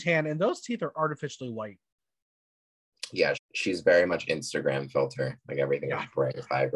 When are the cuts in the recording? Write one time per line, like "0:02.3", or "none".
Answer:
0:03.3